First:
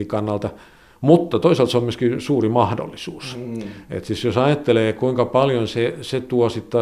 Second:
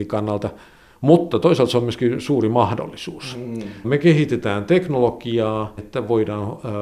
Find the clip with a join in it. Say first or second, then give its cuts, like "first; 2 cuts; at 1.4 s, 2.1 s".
second; 2 cuts; at 3.8 s, 5.8 s